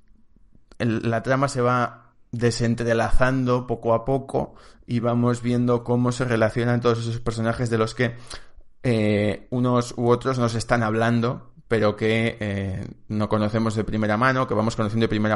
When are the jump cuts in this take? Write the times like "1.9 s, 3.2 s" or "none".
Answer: none